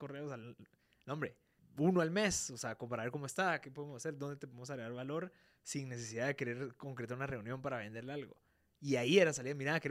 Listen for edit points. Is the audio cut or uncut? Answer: cut